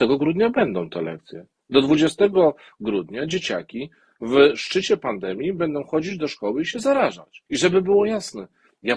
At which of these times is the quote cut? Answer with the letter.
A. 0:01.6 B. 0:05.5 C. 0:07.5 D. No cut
C